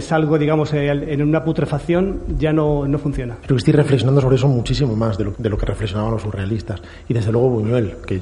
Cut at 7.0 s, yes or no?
no